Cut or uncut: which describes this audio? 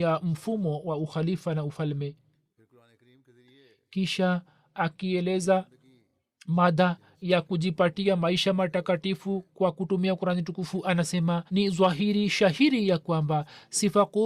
cut